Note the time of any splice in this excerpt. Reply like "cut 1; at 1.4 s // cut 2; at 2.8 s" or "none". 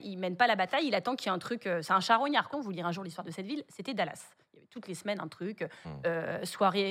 cut 1; at 2.5 s